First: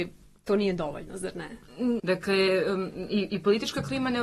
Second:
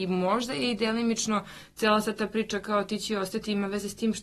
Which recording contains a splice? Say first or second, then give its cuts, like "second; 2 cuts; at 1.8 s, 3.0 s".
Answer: first; 1 cut; at 2.0 s